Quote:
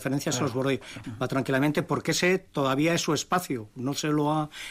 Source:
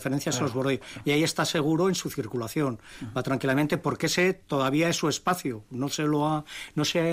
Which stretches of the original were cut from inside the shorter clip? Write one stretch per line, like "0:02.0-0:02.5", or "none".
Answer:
0:01.0-0:03.0